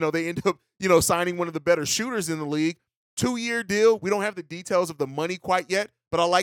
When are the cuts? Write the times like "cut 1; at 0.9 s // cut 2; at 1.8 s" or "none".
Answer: none